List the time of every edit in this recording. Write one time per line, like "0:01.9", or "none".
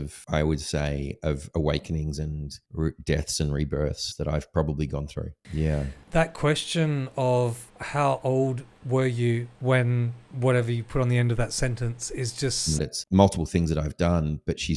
0:12.8